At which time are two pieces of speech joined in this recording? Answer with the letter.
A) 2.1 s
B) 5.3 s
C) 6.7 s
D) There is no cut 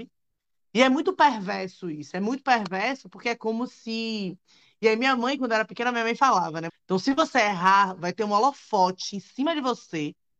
C